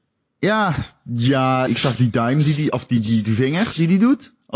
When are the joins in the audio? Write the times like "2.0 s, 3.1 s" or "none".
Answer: 1.7 s